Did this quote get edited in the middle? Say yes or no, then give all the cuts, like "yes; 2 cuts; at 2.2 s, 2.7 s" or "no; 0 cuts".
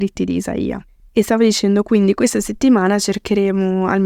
no; 0 cuts